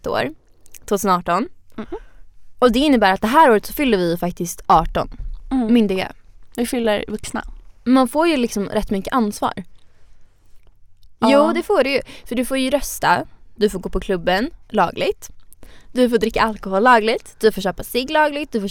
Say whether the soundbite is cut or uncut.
uncut